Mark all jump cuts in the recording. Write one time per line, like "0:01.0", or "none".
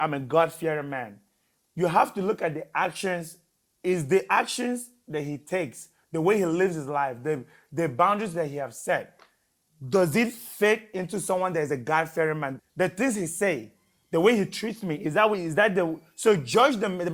0:12.6